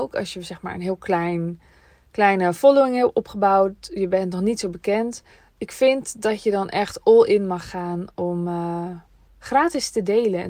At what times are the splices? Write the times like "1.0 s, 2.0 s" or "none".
none

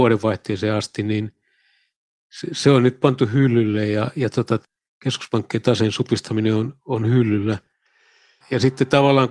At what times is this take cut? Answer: 8.4 s

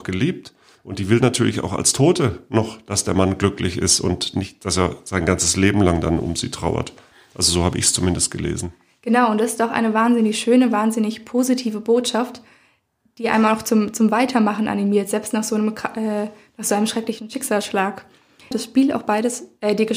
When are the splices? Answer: 18.5 s

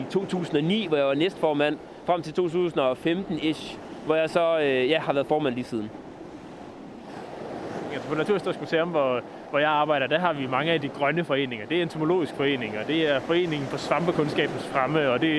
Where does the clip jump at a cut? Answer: 7.9 s

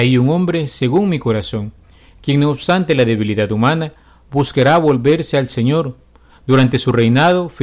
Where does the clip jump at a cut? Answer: none

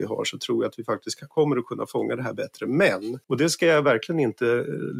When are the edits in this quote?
3.2 s

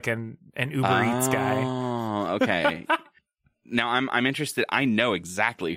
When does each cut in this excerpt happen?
none

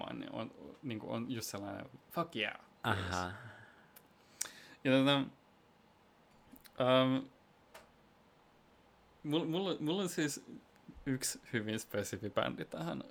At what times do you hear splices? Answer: none

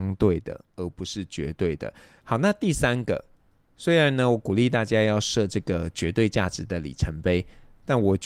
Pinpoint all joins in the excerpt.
2.2 s

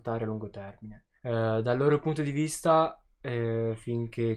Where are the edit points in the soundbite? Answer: 1.2 s

